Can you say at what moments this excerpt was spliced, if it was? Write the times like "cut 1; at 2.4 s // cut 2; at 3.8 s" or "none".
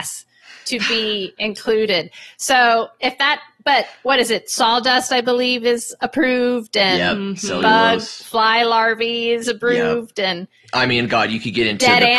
none